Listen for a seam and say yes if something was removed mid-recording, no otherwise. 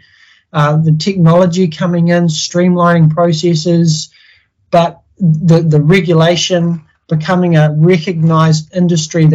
no